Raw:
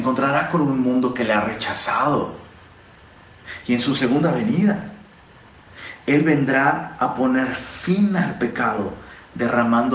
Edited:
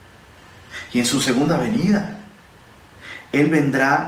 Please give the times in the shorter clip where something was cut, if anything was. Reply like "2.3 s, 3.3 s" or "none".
none